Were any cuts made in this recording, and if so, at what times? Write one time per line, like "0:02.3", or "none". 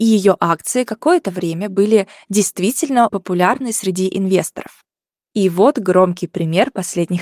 0:03.1
0:05.3